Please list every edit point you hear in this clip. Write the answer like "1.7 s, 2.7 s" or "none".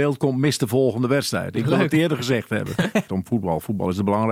1.9 s, 3.1 s